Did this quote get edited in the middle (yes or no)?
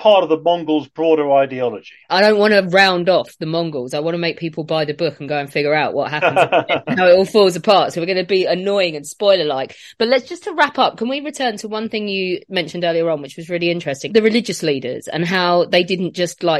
yes